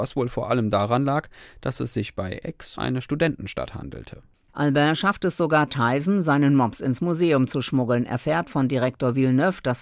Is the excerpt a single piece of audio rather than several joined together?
no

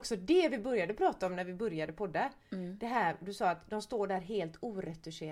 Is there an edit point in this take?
no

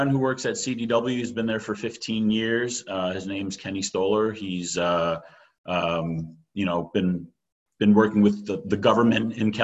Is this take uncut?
yes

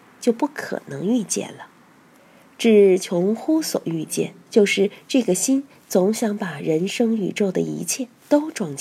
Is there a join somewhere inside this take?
yes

